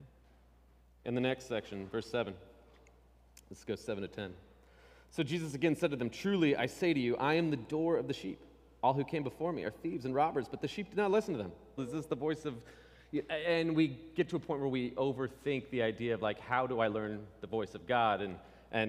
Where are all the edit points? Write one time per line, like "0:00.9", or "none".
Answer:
0:11.8